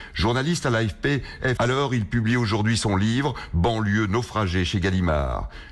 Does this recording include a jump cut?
yes; 1 cut; at 1.6 s

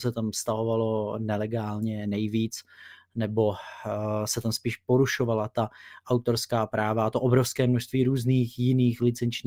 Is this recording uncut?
yes; 0 cuts

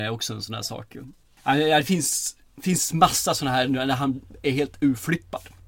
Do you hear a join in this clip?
no; 0 cuts

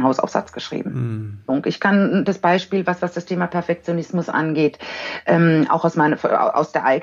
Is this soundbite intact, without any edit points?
no; 1 cut; at 1.5 s

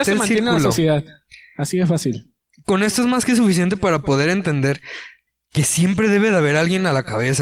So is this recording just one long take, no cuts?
yes; 0 cuts

